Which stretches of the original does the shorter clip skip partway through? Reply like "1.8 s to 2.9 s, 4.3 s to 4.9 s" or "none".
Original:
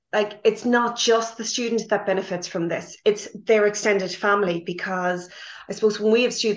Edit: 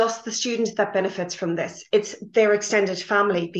none